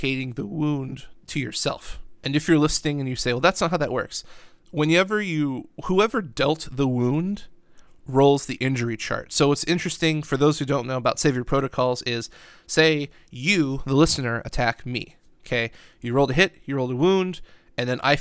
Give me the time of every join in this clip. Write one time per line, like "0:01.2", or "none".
none